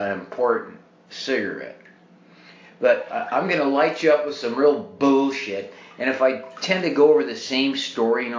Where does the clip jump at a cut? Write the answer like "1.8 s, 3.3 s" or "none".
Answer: 1.1 s